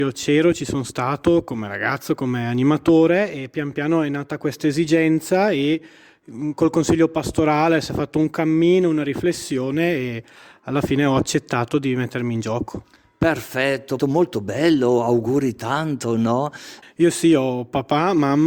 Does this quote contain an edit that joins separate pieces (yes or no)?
yes